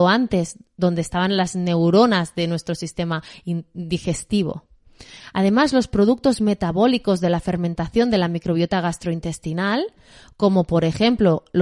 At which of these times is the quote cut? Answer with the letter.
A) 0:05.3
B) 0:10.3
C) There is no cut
C